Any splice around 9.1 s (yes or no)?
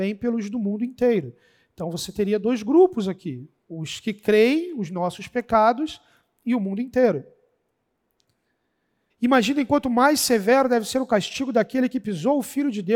yes